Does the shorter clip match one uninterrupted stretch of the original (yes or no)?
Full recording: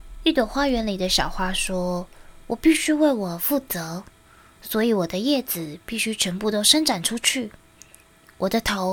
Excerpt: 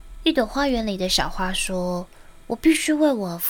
yes